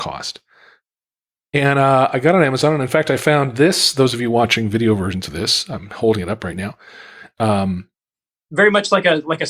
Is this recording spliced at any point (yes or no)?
no